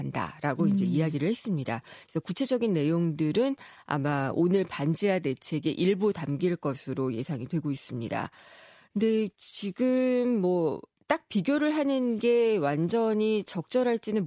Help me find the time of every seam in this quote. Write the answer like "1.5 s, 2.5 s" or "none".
none